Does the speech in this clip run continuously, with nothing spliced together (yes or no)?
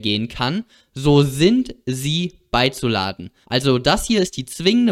no